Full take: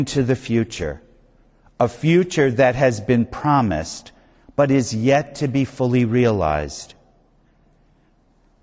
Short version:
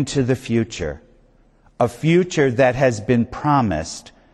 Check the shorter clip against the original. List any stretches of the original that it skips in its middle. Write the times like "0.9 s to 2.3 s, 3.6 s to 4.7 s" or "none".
none